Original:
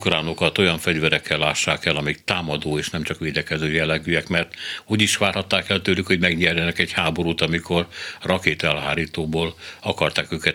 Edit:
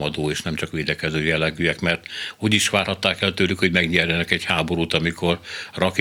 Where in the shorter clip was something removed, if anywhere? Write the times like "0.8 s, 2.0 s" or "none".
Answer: none